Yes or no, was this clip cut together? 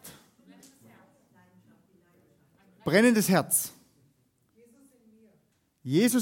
no